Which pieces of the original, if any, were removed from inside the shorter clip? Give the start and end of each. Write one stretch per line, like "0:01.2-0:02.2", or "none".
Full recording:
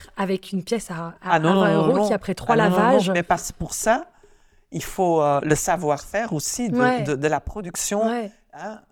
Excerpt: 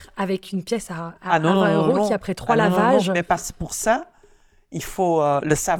none

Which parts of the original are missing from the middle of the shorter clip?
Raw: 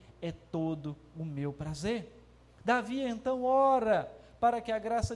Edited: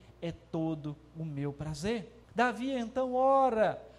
0:02.2-0:02.5

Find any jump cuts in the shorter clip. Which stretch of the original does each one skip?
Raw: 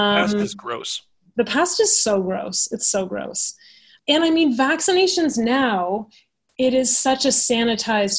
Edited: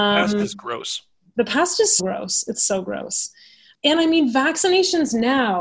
0:02.0-0:02.2

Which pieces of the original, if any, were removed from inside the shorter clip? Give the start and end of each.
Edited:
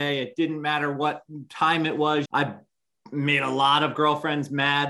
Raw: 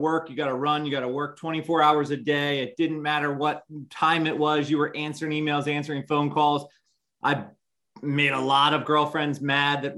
0:04.7-0:07.2

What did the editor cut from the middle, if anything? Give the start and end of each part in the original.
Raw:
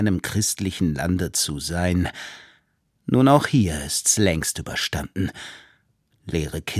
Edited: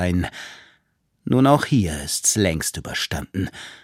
none

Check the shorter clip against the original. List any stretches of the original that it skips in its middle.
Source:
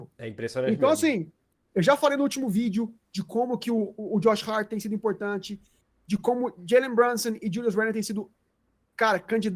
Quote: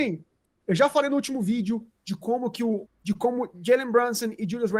0:03.9-0:05.9

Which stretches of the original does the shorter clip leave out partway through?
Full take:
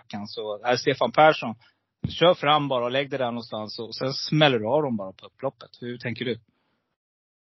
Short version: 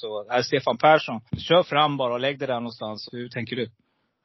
0:01.6-0:02.0
0:03.8-0:05.7

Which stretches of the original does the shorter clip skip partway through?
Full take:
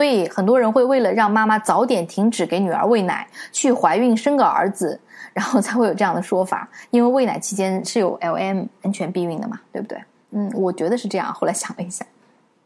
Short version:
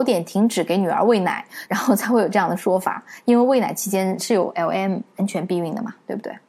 0:03.5-0:05.3

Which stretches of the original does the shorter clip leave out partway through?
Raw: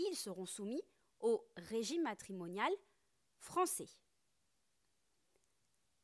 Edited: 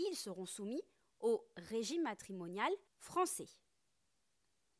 0:02.9-0:03.3

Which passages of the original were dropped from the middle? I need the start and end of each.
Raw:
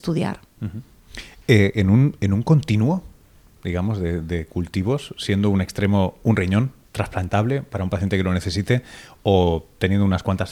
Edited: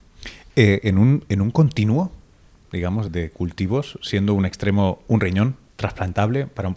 0:04.0-0:04.2

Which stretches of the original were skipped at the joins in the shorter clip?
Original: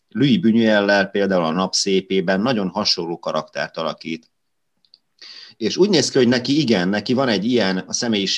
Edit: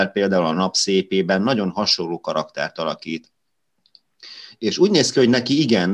none

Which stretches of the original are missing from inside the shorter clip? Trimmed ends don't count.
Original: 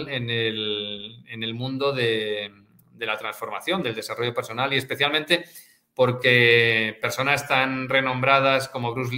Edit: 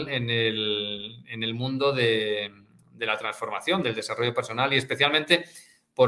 none

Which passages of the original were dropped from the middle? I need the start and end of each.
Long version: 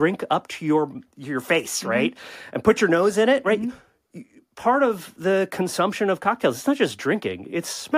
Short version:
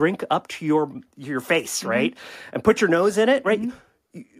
none

